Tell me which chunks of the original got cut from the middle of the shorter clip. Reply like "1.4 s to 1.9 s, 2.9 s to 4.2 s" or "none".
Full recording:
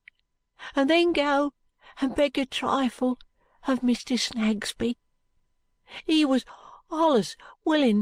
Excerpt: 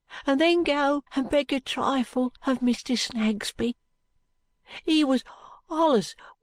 1.6 s to 1.9 s, 3.2 s to 3.6 s